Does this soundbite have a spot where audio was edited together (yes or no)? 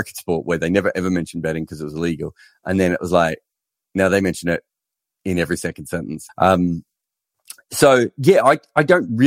yes